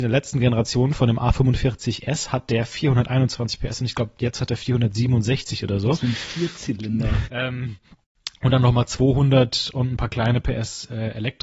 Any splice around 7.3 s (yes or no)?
yes